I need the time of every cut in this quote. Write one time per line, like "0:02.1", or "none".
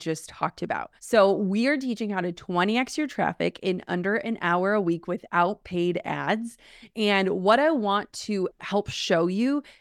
0:01.0